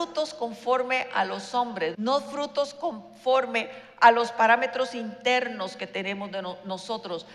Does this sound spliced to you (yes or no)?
yes